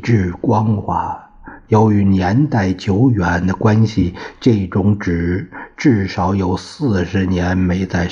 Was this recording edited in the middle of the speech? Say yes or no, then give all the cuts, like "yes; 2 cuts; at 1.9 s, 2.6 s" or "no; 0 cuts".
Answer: no; 0 cuts